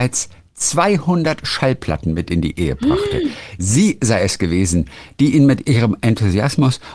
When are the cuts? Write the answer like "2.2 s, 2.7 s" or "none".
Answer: none

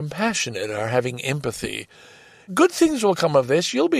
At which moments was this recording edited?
2.5 s

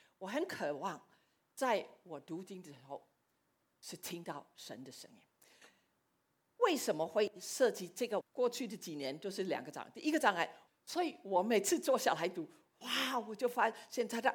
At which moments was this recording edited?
8.2 s, 10.7 s

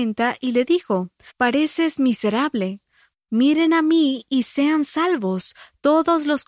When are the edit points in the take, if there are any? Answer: 1.3 s, 3.1 s

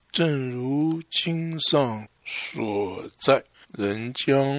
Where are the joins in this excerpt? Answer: 3.5 s

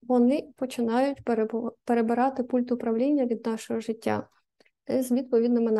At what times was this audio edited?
4.7 s

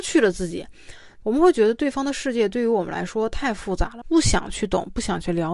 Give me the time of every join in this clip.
1.2 s, 4.0 s

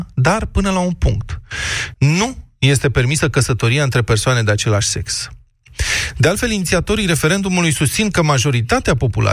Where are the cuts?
1.9 s

